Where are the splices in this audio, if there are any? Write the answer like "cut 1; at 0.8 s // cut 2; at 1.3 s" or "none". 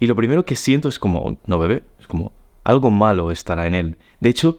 cut 1; at 1.4 s